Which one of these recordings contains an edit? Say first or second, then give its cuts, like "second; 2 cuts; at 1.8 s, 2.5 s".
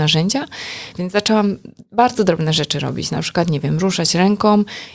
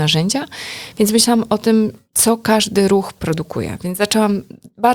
first; 1 cut; at 0.9 s